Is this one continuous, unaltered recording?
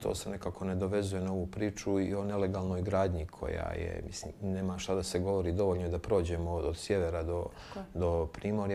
yes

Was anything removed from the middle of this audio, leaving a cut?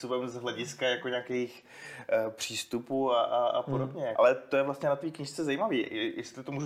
yes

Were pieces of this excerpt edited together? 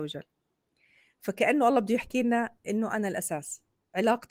no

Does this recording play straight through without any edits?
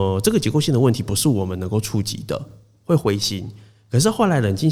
yes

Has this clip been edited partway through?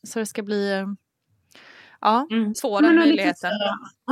yes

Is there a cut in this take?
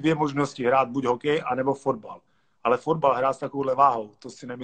no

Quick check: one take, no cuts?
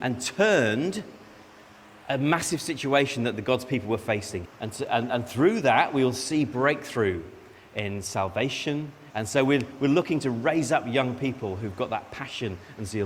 no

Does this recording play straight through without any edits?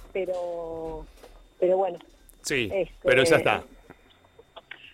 yes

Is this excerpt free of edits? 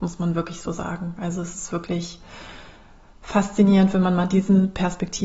yes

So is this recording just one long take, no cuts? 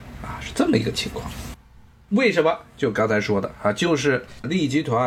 yes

